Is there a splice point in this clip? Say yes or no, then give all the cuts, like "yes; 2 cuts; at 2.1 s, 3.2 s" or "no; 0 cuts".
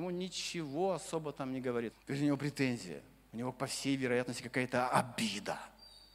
yes; 1 cut; at 1.9 s